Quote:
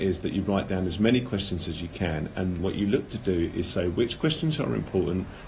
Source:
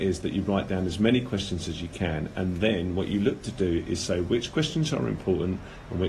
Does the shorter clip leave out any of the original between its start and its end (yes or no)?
yes